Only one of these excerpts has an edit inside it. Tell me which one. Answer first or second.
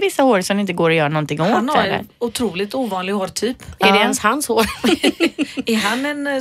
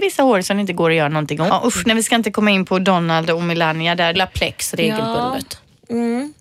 second